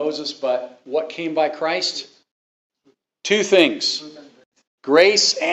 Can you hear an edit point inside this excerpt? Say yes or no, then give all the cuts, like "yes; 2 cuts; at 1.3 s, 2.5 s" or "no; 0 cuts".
no; 0 cuts